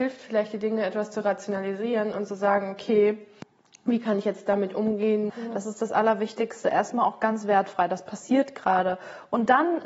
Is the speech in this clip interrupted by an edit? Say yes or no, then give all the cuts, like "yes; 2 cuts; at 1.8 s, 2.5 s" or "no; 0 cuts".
yes; 1 cut; at 5.3 s